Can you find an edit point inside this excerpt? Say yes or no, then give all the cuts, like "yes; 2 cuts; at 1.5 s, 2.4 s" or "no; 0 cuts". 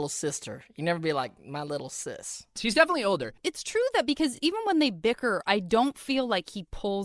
no; 0 cuts